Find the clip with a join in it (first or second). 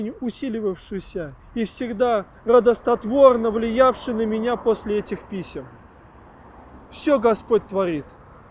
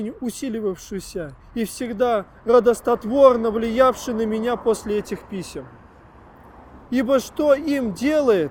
second